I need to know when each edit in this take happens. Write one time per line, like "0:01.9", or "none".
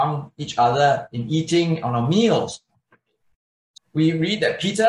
0:03.8